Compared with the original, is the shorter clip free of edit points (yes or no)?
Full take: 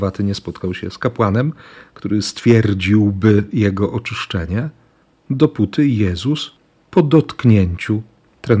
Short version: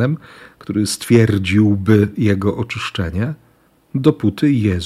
yes